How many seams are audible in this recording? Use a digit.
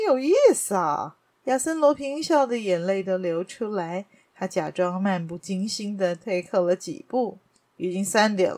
0